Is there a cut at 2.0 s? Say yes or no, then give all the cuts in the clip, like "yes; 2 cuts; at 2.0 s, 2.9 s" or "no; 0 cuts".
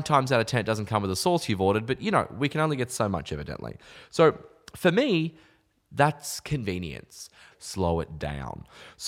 no; 1 cut; at 7.5 s